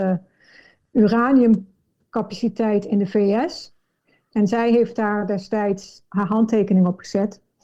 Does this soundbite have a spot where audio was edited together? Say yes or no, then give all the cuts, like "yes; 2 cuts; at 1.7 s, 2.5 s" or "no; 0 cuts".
yes; 2 cuts; at 4.3 s, 6.0 s